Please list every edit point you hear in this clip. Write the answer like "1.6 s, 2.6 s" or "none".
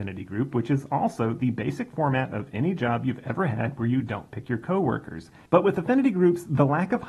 5.5 s

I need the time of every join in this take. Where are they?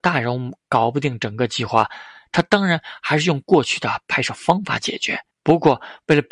5.3 s

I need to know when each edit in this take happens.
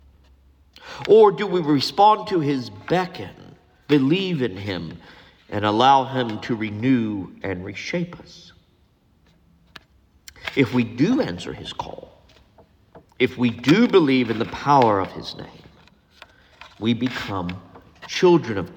3.9 s

